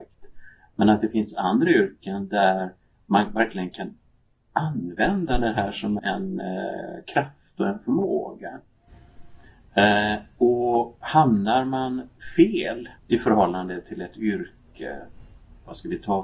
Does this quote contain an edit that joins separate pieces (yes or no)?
yes